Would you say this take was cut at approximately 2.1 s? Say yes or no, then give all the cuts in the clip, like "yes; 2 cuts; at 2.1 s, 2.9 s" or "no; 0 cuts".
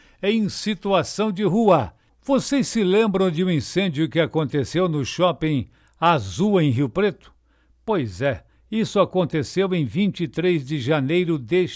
yes; 1 cut; at 2.1 s